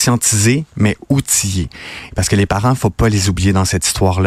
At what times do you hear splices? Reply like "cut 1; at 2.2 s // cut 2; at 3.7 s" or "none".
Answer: cut 1; at 2.1 s

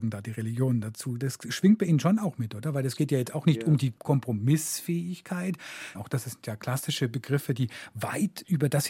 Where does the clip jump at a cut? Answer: cut 1; at 5.9 s

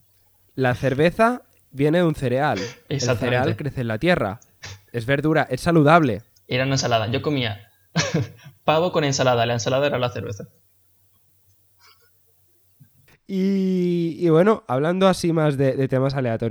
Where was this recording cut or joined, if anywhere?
none

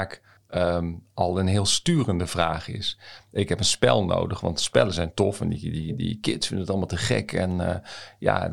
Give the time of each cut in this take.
cut 1; at 3.3 s

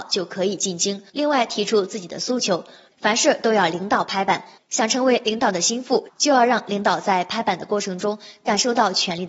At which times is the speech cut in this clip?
cut 1; at 1.1 s // cut 2; at 2.9 s

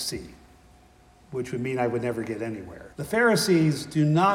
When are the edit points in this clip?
cut 1; at 2.9 s

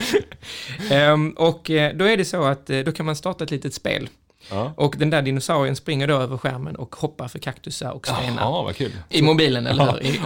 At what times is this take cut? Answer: cut 1; at 9.1 s

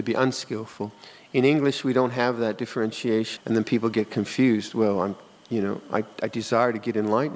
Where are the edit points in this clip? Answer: cut 1; at 3.4 s

